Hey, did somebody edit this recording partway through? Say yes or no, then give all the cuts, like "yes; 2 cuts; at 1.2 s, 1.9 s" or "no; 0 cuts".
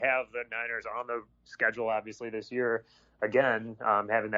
no; 0 cuts